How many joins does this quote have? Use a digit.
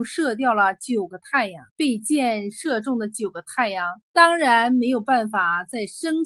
2